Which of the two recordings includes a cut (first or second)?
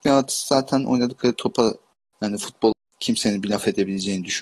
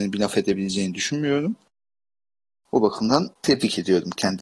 second